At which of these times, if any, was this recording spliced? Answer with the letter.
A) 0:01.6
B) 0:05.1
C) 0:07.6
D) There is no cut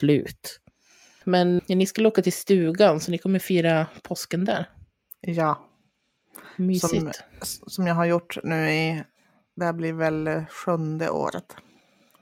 A